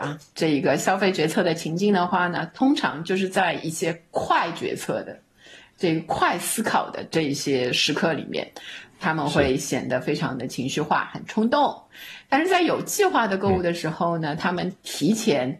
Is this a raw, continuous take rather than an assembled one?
yes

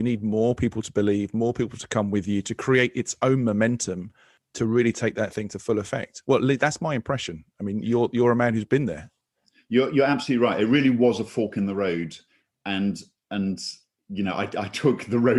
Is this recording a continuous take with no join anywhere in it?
yes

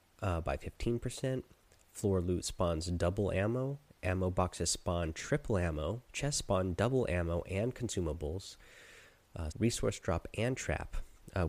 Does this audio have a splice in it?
yes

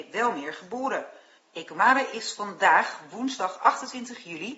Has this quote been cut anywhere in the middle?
yes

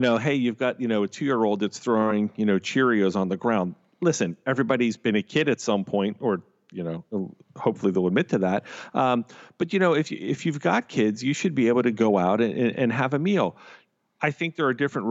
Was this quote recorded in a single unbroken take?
yes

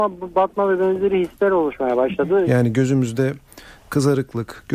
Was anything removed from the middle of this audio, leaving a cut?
yes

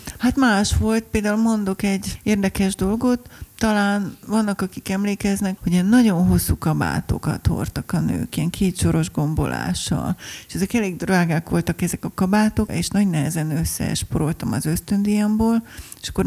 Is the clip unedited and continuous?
no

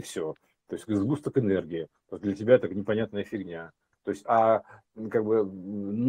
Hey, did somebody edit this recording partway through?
yes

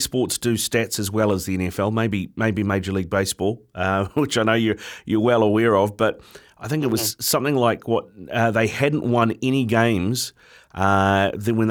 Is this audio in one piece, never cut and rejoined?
yes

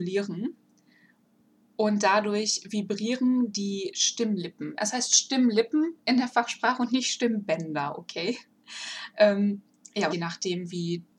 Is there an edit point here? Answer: yes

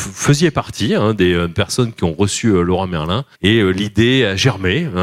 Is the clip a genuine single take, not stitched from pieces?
no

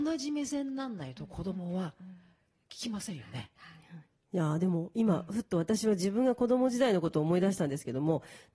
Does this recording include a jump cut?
no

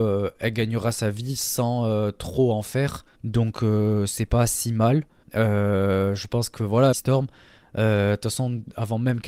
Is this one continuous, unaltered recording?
no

